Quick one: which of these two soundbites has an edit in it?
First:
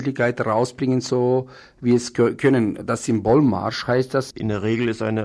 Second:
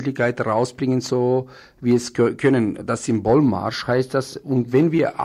first; 1 cut; at 4.3 s

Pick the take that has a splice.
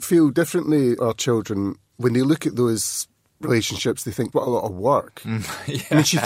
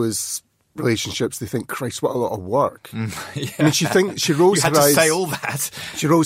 first; 2 cuts; at 1.0 s, 4.3 s

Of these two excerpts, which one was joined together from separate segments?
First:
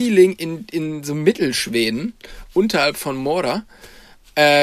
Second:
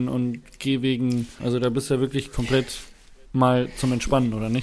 second; 1 cut; at 1.4 s

